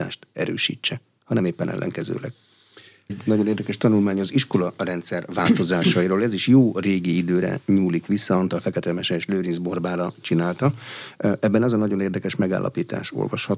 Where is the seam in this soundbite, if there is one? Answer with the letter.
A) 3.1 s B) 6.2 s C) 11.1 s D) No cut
A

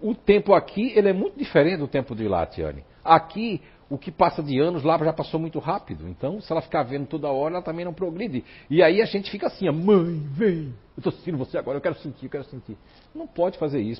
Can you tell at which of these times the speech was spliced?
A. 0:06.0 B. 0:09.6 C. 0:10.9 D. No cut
D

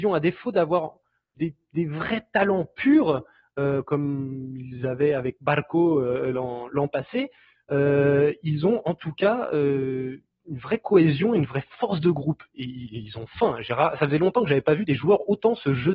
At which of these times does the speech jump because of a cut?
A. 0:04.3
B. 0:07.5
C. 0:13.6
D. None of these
D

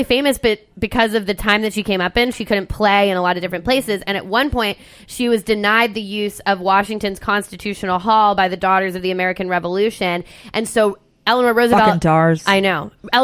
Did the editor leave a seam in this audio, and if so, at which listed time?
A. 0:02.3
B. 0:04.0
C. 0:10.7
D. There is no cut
A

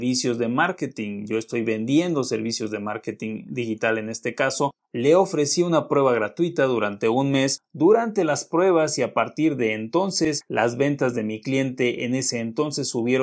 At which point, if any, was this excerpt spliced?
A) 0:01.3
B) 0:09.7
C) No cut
C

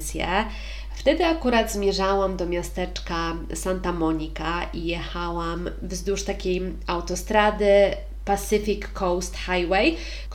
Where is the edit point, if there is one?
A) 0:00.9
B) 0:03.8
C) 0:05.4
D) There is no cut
D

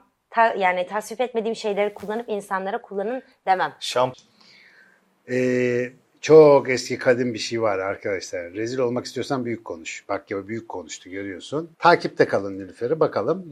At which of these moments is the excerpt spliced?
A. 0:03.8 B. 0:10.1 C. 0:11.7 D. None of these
C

